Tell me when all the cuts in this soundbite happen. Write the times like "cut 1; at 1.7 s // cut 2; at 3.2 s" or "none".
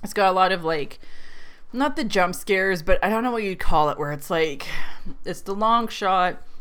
none